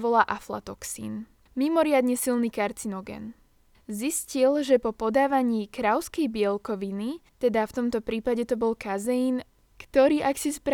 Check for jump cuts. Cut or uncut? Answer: uncut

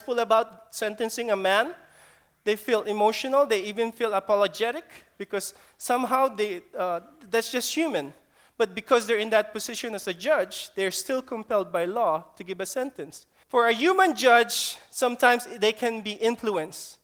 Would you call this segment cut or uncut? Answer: cut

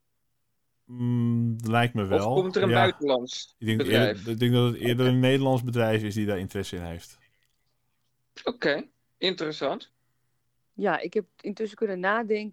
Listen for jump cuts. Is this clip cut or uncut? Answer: uncut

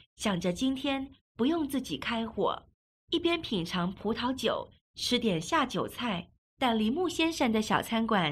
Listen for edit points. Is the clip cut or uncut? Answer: cut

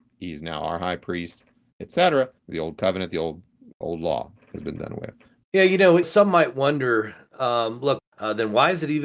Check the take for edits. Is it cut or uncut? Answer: cut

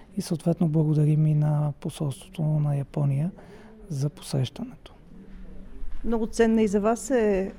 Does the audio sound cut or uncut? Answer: uncut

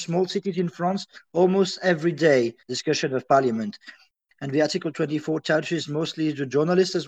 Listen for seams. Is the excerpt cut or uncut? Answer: cut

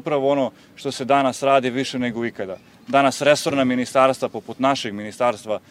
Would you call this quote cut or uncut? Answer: uncut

